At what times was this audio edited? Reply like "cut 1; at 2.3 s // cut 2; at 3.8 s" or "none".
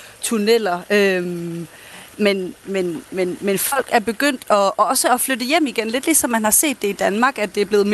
none